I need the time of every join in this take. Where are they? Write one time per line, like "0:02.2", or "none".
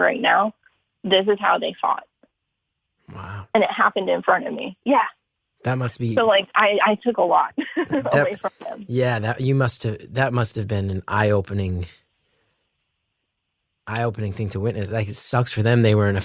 none

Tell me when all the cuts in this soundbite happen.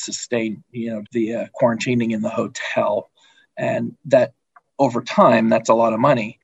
0:01.1

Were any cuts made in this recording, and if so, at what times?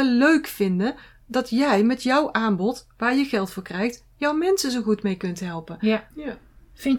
0:06.1

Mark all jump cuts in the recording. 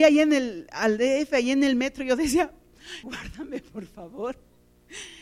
0:03.0

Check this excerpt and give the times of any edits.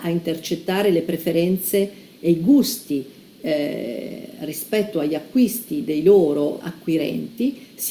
0:06.6

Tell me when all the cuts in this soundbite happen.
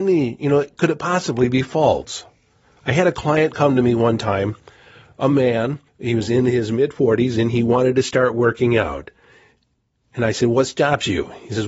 0:05.9

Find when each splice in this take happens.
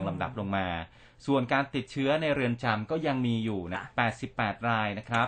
0:03.7

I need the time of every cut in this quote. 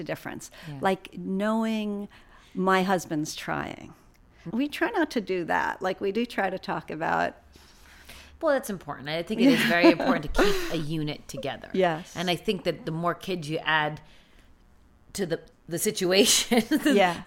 0:04.5
0:15.5

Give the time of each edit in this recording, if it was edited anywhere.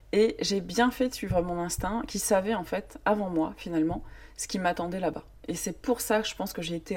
none

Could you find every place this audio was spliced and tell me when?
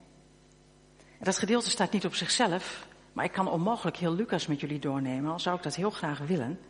0:01.1

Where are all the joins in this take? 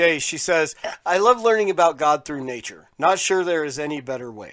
0:02.9

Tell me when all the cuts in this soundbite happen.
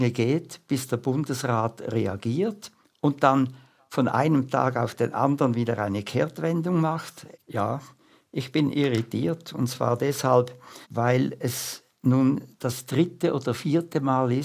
0:07.3
0:10.8

